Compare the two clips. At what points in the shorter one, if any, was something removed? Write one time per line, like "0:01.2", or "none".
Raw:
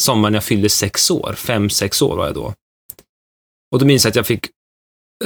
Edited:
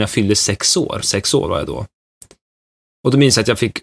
0:01.0